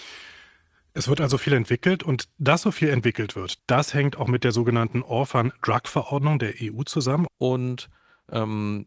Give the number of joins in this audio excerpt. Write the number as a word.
two